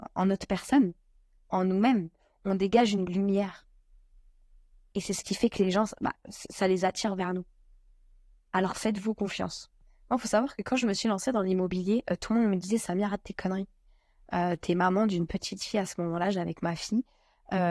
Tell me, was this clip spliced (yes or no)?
no